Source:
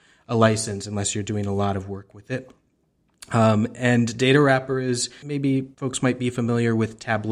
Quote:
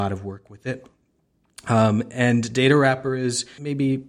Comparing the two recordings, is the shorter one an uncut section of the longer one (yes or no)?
yes